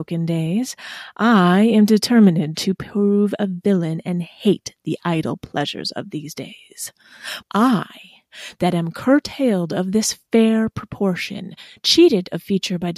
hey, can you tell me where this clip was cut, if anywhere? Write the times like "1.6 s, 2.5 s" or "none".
7.4 s